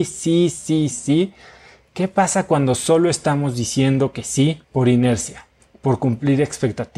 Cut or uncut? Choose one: cut